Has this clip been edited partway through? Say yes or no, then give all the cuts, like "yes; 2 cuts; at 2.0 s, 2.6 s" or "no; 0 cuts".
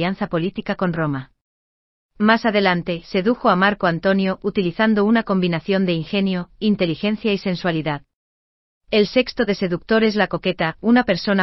yes; 1 cut; at 9.5 s